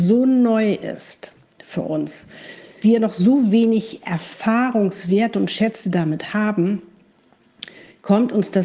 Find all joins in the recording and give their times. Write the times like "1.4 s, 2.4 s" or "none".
2.8 s